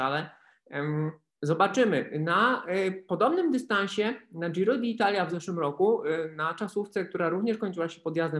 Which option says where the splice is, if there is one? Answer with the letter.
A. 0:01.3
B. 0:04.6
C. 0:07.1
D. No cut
A